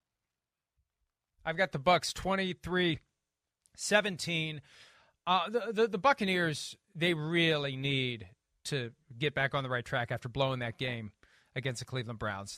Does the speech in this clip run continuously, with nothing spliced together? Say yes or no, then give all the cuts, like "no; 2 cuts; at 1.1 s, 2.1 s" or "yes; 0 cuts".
yes; 0 cuts